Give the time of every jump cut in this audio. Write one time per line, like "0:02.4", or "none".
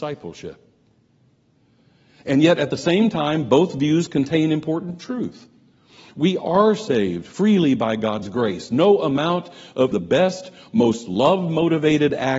0:09.9